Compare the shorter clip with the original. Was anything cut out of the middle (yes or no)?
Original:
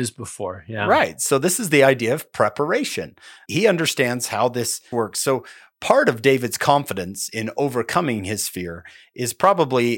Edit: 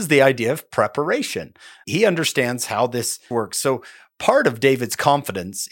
no